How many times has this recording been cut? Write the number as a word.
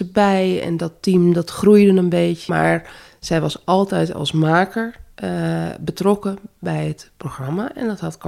one